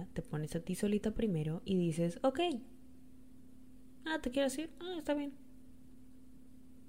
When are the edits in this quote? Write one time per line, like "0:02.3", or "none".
none